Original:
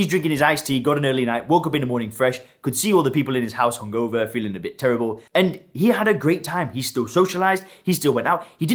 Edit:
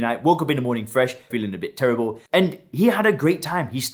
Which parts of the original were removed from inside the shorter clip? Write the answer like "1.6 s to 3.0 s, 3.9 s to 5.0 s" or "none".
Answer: 2.5 s to 4.3 s